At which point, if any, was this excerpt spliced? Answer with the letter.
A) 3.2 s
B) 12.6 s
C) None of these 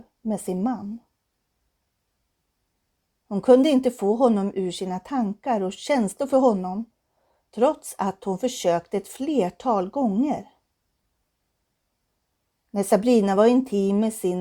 A